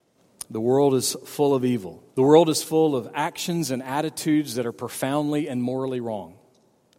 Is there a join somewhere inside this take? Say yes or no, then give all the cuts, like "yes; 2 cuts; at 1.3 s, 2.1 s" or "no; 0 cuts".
yes; 1 cut; at 2.1 s